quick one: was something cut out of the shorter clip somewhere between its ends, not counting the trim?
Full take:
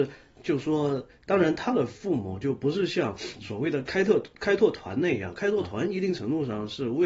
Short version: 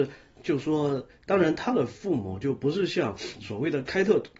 no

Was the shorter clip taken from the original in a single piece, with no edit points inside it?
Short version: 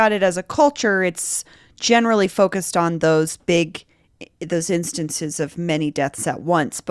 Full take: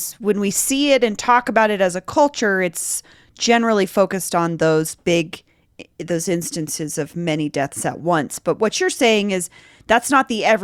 yes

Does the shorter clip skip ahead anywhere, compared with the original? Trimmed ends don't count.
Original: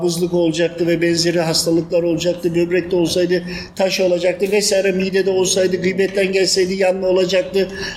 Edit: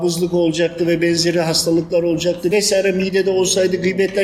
yes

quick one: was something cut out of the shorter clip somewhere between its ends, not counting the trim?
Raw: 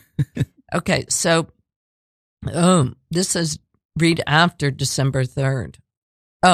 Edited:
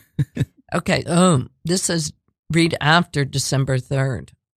yes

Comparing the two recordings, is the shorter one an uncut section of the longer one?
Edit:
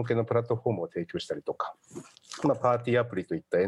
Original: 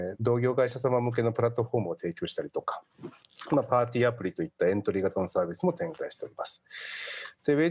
yes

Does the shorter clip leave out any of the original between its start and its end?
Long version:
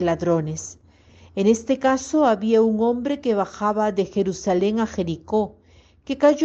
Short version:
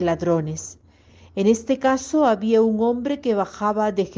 no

